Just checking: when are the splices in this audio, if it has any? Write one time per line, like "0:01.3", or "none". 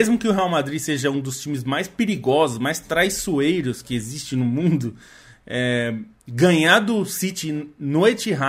none